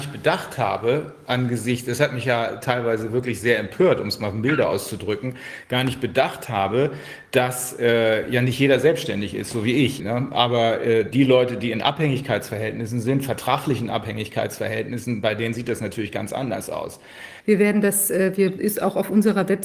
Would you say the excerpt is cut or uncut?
cut